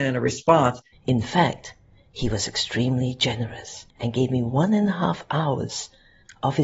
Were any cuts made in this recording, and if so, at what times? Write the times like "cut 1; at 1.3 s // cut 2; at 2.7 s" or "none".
cut 1; at 0.9 s // cut 2; at 3.9 s